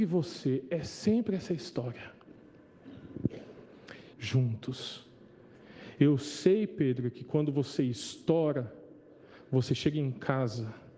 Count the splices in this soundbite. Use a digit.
1